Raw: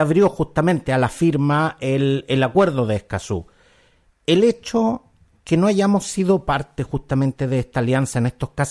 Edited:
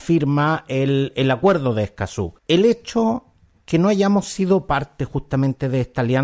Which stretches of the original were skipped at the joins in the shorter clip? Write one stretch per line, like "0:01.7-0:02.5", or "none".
0:03.5-0:04.2